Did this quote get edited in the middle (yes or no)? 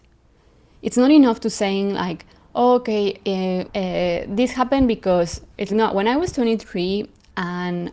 yes